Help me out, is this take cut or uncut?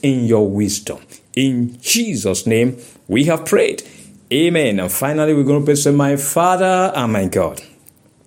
uncut